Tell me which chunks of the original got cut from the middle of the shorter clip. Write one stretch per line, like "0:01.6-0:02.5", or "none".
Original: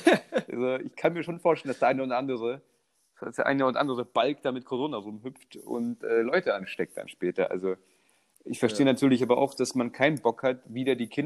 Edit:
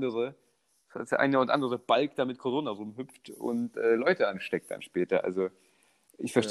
none